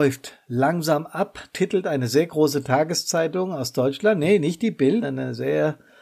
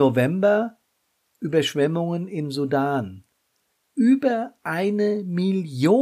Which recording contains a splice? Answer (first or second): first